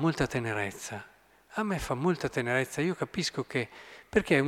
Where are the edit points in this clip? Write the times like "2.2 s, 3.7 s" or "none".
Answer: none